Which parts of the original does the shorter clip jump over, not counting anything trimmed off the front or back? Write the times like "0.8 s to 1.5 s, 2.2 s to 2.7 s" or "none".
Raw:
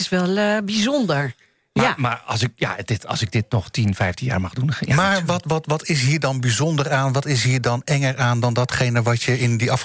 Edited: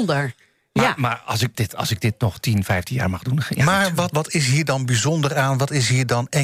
2.5 s to 2.8 s, 5.4 s to 5.7 s